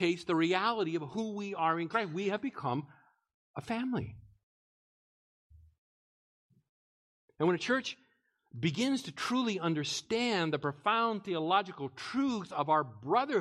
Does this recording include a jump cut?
no; 0 cuts

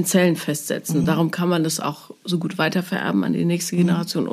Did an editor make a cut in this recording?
no; 0 cuts

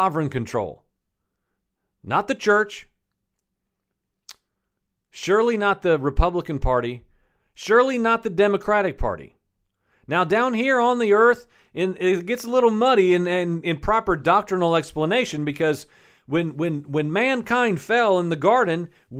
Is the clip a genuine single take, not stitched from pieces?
yes; 0 cuts

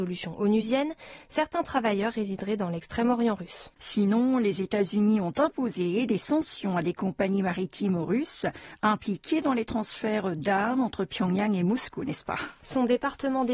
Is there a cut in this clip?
yes; 1 cut; at 3.8 s

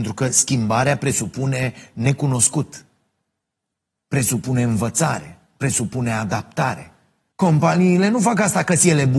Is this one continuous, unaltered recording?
no; 1 cut; at 7.3 s

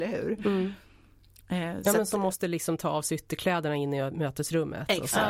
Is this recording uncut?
yes; 0 cuts

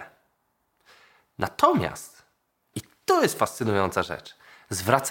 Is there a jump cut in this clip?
no; 0 cuts

